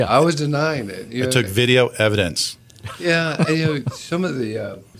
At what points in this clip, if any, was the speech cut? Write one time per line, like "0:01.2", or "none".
none